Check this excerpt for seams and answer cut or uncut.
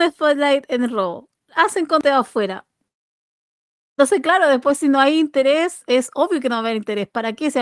uncut